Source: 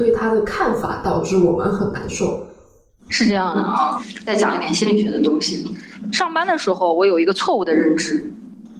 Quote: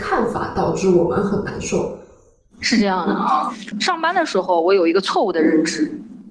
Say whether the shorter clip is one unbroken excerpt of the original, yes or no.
no